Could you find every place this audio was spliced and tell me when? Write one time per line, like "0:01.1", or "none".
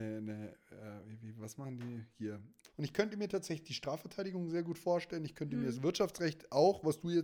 0:02.7